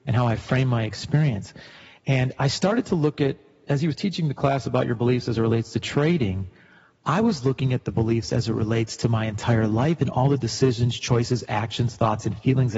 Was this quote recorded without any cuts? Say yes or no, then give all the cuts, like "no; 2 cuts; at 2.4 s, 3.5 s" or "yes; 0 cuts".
no; 1 cut; at 2.0 s